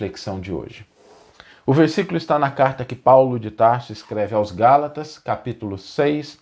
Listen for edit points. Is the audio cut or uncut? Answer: uncut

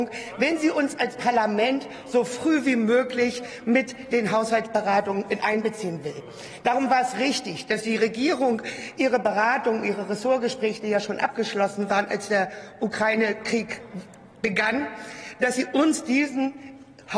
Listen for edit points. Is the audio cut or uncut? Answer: uncut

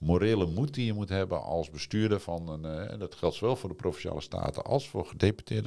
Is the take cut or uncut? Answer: uncut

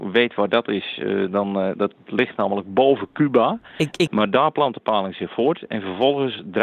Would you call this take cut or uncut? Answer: cut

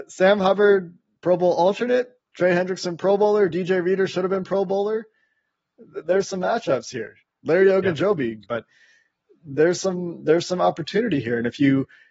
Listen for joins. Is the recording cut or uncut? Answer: cut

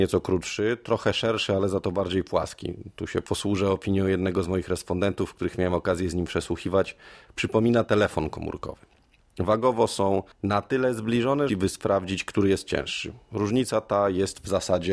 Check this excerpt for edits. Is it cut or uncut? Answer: cut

